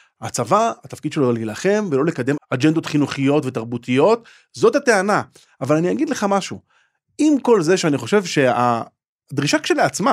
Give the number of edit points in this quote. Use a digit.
1